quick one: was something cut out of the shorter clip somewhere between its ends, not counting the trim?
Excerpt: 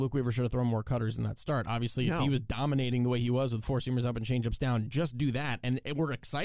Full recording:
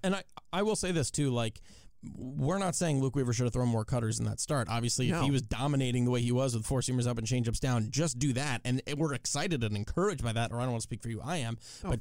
no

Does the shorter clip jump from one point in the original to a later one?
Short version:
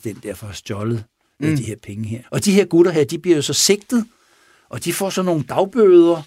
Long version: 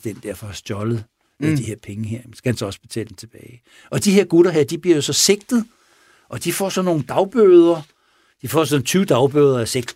yes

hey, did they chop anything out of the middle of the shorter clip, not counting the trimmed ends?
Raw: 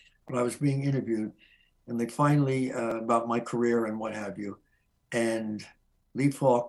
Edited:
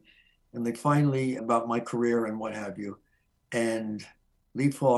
yes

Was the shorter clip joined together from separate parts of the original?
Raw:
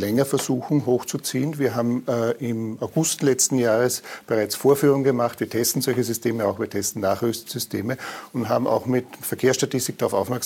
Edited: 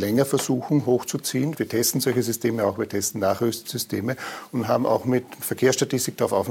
yes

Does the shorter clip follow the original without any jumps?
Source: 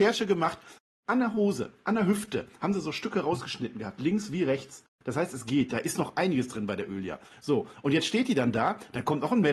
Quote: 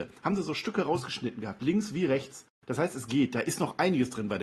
yes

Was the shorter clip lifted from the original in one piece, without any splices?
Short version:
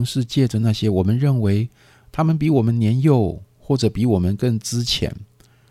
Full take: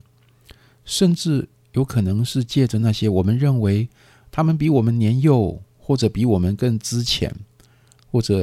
yes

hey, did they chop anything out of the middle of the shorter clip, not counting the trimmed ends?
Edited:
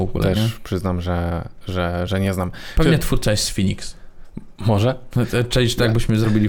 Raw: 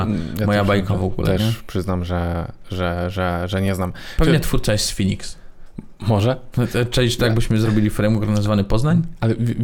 yes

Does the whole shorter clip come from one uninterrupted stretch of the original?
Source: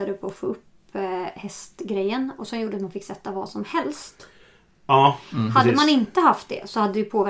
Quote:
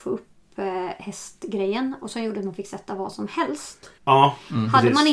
no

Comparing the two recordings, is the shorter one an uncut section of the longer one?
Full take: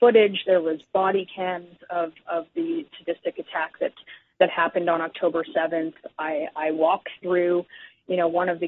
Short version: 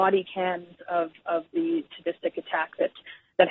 yes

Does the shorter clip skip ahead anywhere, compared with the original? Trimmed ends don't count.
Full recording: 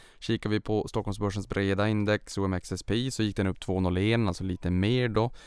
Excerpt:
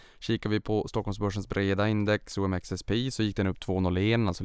no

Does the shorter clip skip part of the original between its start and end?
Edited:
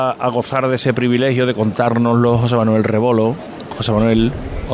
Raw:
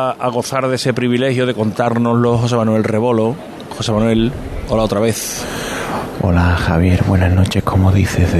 no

